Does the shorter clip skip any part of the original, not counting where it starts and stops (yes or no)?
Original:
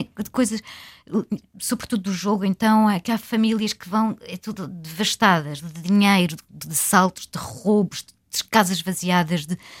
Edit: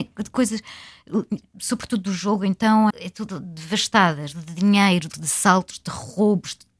yes